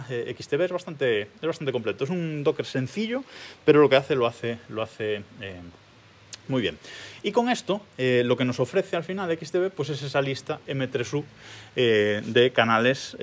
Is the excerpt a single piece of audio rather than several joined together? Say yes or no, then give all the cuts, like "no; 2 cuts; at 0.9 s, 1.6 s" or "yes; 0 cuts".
yes; 0 cuts